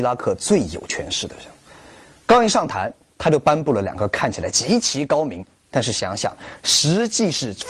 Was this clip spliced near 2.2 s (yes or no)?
no